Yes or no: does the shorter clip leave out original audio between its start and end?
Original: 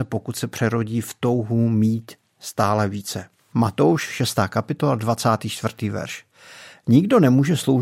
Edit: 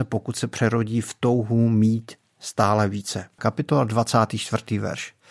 yes